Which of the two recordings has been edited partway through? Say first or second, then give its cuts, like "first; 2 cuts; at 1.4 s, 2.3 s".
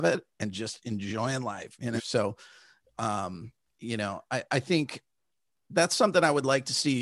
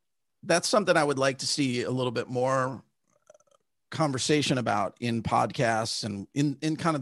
first; 1 cut; at 2.0 s